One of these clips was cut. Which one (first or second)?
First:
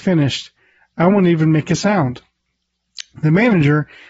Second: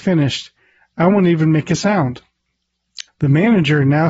second